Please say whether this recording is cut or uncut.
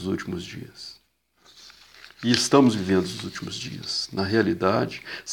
uncut